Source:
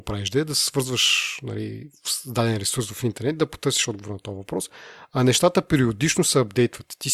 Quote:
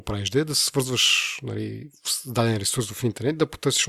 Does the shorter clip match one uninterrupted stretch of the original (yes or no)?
yes